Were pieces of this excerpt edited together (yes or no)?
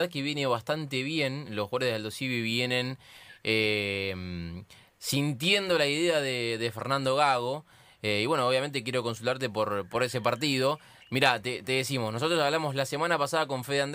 no